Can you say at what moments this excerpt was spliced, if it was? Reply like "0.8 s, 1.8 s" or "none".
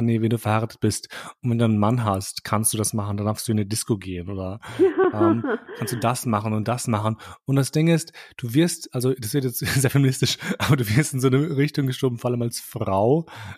none